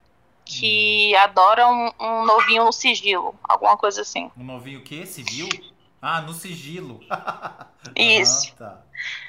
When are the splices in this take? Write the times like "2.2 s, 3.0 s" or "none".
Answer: 6.0 s